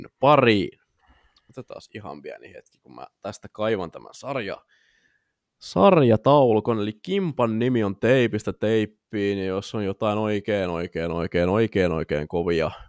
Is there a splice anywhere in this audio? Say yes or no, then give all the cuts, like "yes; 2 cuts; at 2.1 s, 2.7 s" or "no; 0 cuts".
no; 0 cuts